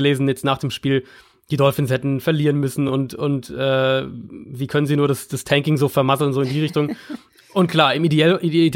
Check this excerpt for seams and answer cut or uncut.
uncut